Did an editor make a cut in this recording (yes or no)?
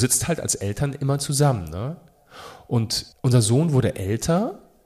yes